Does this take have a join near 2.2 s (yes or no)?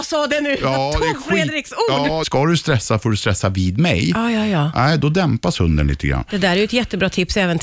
yes